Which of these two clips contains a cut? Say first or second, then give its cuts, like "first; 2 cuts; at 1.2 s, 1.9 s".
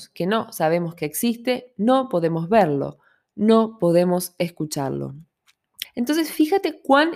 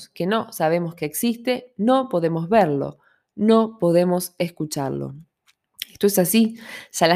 first; 1 cut; at 5.8 s